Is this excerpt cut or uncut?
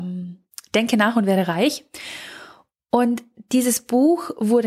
uncut